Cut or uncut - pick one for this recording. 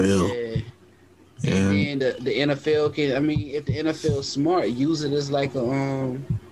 uncut